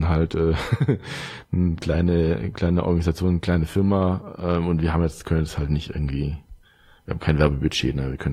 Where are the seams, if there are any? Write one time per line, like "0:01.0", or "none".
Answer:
none